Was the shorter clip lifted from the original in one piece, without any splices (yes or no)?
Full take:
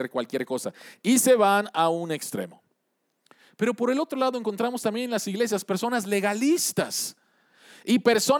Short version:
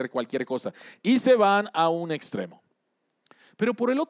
yes